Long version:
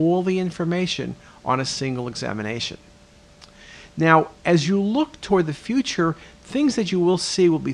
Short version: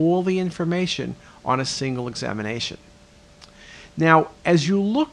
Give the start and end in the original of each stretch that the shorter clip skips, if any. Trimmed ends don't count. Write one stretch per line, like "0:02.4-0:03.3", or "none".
none

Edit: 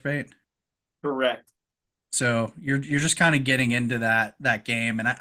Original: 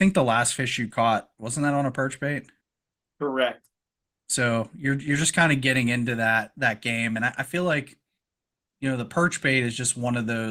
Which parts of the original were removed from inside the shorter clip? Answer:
none

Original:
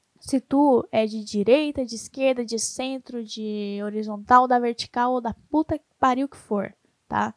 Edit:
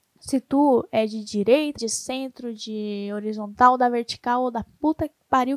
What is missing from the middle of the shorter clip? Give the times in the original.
0:01.8-0:02.5

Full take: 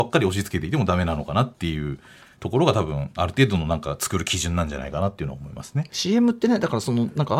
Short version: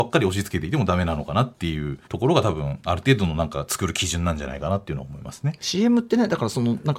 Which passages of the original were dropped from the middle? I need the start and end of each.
0:02.1-0:02.4

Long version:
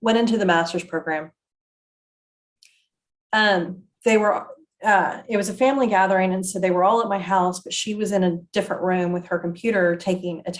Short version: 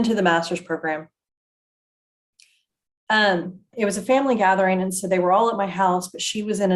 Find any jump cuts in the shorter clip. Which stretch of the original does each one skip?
0:04.0-0:05.2

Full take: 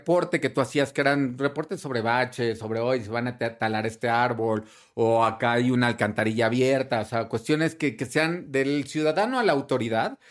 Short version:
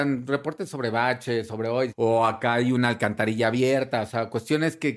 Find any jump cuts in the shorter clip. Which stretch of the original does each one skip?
0:03.0-0:04.9

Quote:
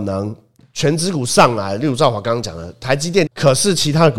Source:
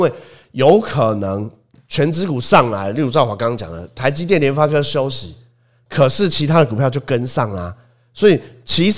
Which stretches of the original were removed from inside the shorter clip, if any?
0:04.4-0:05.8

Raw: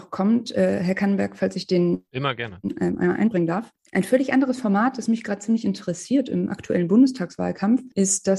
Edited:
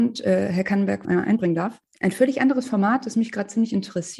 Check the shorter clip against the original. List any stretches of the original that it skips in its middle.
0:01.4-0:03.0

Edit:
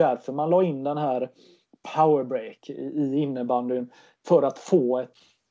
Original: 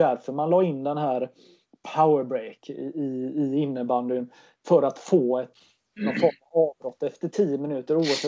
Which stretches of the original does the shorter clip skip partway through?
0:02.9-0:03.3

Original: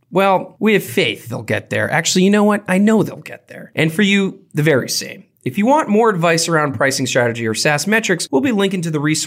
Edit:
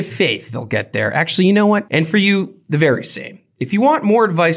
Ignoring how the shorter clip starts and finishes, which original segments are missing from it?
0:02.6-0:03.7

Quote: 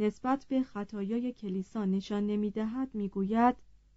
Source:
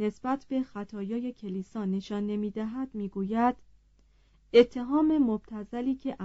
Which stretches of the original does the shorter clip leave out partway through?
none

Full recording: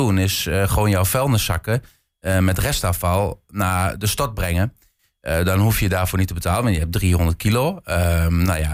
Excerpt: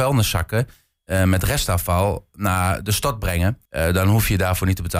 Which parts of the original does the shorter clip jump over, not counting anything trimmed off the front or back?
0:04.8-0:05.2

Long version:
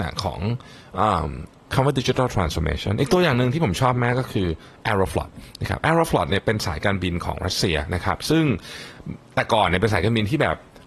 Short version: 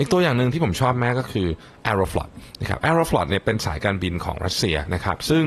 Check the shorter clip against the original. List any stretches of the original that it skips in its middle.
none

